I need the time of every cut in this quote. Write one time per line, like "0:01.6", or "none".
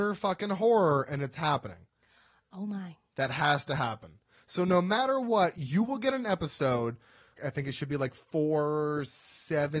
0:07.4